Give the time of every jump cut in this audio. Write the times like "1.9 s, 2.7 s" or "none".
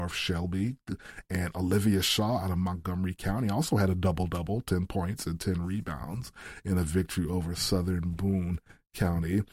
none

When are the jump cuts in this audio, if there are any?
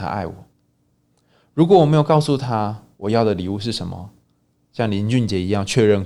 4.5 s

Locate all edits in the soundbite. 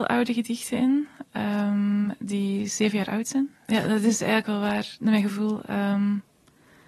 3.5 s

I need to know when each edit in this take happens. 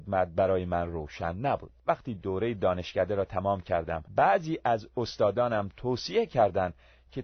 1.8 s, 4.1 s

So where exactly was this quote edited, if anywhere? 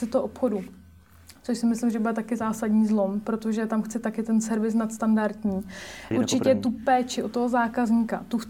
6.1 s

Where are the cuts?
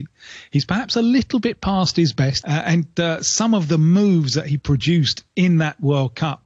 2.4 s

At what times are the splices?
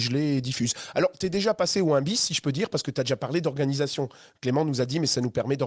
none

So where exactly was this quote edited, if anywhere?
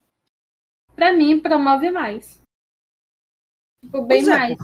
none

